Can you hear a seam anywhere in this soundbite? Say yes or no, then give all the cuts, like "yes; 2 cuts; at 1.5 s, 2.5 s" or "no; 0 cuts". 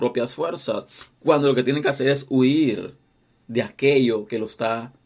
no; 0 cuts